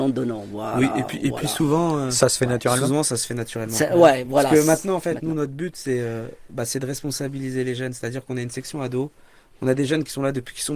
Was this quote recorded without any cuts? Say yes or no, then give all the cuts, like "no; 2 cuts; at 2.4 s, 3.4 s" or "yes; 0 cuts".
yes; 0 cuts